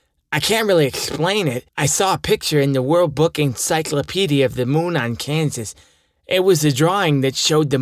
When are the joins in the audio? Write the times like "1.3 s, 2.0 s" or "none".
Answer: 1.7 s